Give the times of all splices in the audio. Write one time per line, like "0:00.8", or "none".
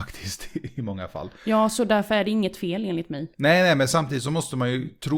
none